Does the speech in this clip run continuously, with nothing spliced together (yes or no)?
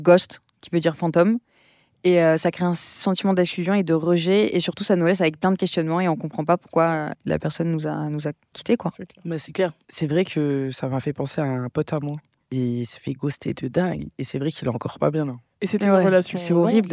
no